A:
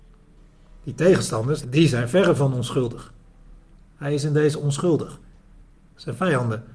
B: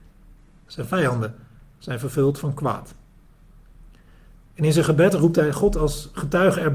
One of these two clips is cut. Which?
A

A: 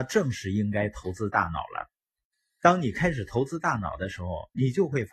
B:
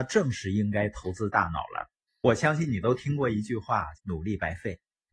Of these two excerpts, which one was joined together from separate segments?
B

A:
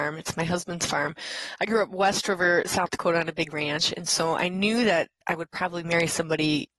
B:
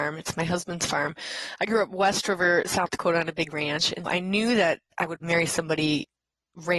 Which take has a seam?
B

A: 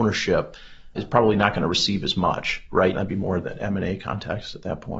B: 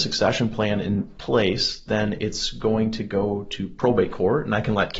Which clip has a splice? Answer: A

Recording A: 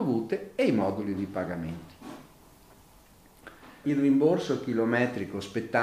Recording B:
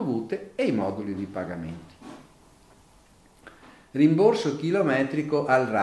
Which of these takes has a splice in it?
A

